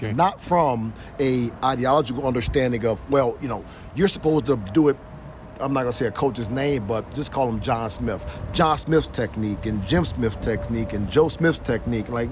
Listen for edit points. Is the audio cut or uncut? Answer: uncut